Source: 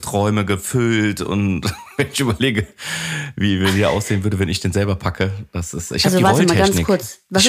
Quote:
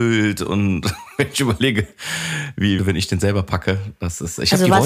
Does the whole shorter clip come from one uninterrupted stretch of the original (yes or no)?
no